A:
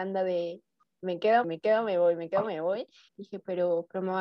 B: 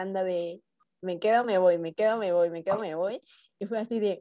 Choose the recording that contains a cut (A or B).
A